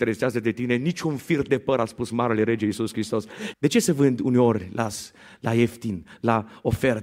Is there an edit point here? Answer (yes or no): yes